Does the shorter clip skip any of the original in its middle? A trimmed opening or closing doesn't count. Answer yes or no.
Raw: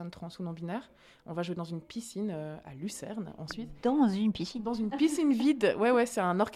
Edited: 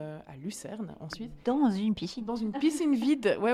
no